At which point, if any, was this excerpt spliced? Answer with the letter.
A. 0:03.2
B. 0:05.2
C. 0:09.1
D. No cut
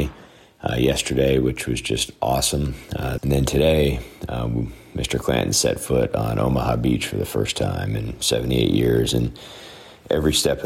A